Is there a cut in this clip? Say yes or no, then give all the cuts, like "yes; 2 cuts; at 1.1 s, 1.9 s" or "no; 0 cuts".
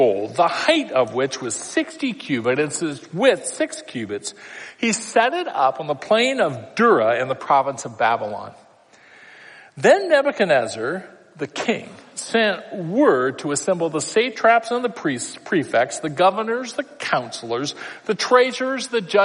no; 0 cuts